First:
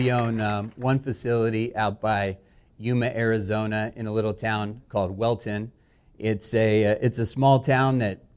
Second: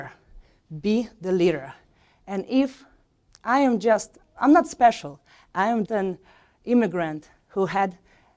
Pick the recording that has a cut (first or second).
second